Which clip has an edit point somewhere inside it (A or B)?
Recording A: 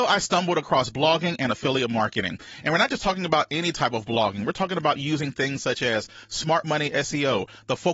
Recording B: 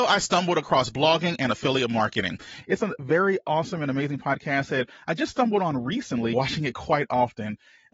B